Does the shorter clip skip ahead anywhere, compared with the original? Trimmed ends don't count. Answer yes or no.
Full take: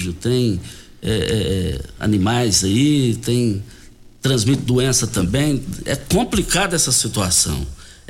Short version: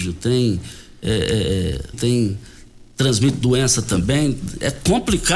yes